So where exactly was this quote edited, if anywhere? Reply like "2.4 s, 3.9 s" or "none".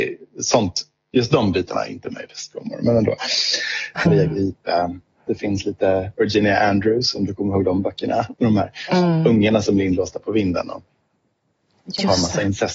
4.0 s

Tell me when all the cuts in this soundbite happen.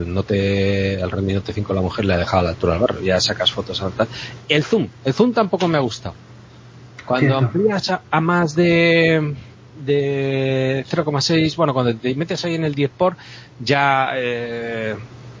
none

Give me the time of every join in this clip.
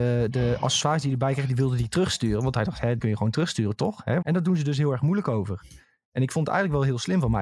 3.0 s, 4.2 s

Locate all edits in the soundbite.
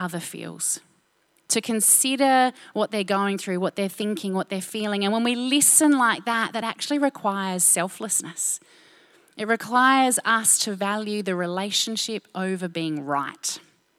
none

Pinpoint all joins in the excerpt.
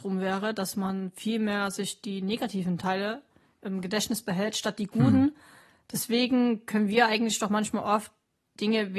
none

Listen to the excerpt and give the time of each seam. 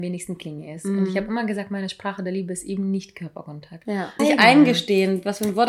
4.2 s

